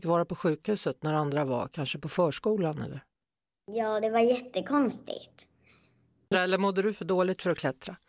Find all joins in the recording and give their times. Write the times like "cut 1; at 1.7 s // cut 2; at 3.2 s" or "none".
cut 1; at 6.3 s